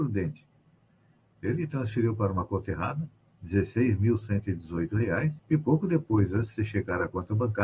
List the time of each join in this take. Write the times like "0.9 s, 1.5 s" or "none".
5.4 s